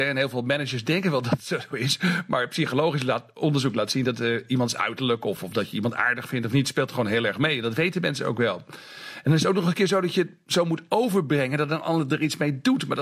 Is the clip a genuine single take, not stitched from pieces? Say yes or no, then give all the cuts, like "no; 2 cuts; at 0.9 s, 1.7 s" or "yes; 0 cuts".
yes; 0 cuts